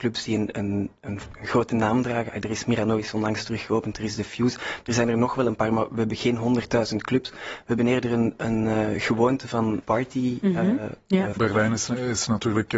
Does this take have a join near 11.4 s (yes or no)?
yes